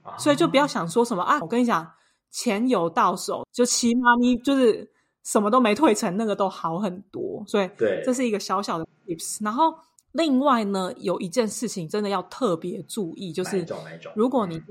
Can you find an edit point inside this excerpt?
yes; 2 cuts; at 1.4 s, 3.4 s

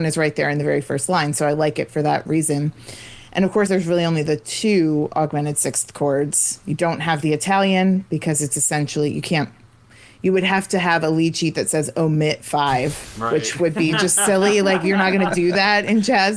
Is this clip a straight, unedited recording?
no; 1 cut; at 3.7 s

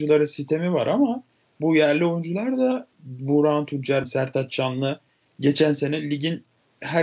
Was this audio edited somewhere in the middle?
yes; 1 cut; at 4.0 s

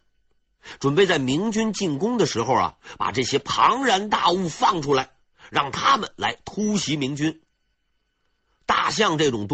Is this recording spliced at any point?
no; 0 cuts

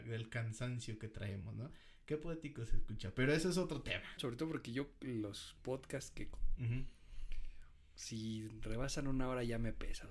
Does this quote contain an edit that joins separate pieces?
yes; 2 cuts; at 4.2 s, 6.6 s

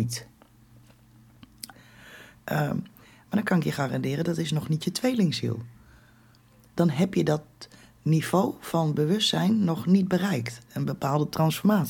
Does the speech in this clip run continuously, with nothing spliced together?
no; 1 cut; at 1.7 s

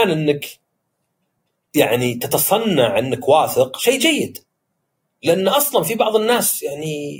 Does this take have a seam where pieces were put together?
no; 0 cuts

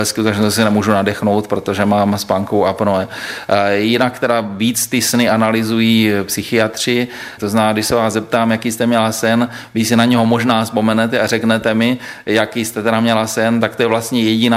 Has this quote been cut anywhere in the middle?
yes; 1 cut; at 7.4 s

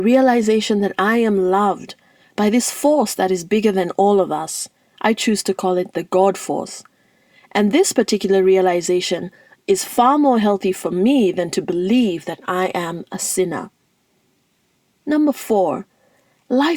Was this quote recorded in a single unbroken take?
yes; 0 cuts

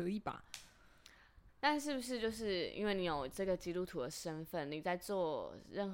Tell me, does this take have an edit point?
yes; 1 cut; at 1.5 s

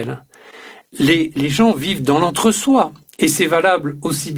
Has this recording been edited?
no; 0 cuts

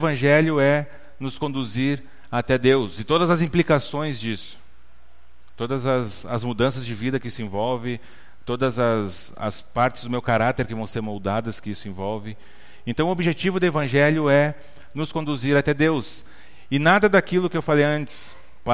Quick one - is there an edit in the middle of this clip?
no; 0 cuts

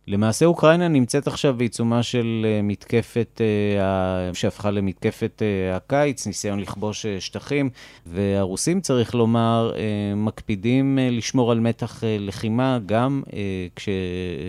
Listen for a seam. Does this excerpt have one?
yes; 2 cuts; at 4.3 s, 8.0 s

